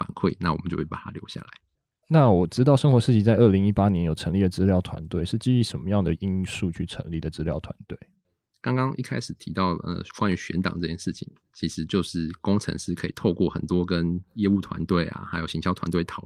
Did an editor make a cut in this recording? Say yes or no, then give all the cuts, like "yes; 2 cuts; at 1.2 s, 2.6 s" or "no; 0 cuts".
no; 0 cuts